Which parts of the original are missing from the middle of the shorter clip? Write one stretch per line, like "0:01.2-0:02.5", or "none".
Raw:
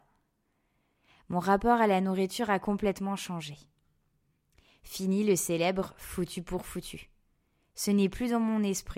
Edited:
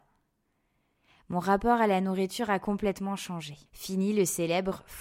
0:03.7-0:04.8